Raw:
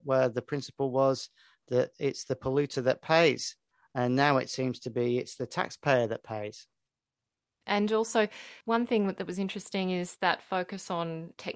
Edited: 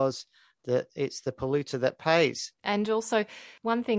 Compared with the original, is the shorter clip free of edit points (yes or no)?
no